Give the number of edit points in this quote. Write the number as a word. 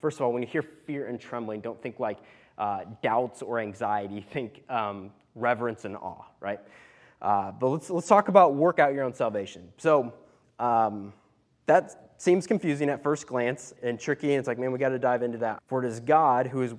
two